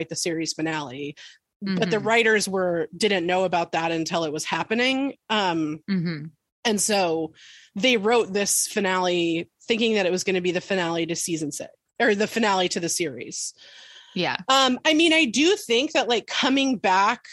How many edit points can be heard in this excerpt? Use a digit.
0